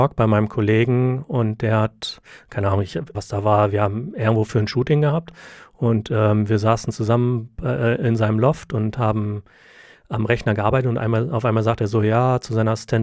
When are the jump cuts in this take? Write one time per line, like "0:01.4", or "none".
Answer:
0:03.1